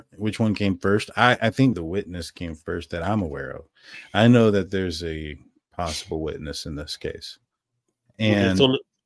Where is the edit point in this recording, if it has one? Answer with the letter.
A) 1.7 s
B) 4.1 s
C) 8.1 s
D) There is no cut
A